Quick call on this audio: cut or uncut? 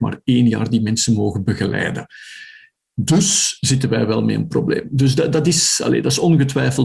uncut